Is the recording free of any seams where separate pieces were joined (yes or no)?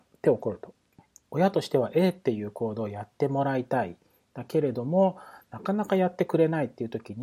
no